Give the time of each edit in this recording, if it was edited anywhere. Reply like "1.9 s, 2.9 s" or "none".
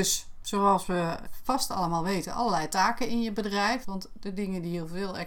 1.3 s, 3.8 s

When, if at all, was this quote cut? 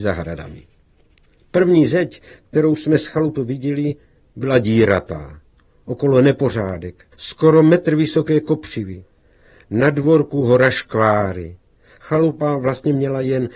7.1 s

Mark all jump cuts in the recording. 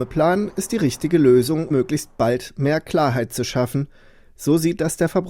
1.7 s

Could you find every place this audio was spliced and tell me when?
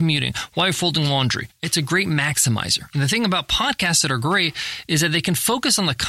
none

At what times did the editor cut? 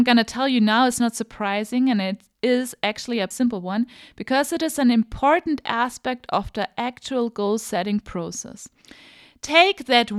3.3 s

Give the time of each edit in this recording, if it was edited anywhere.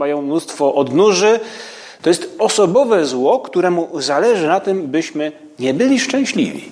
2.0 s

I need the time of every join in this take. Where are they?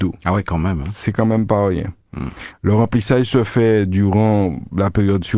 2.5 s

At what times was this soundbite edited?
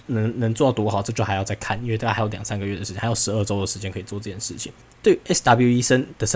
4.9 s

